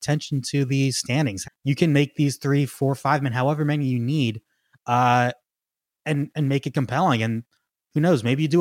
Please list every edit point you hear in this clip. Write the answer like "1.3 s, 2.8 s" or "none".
1.4 s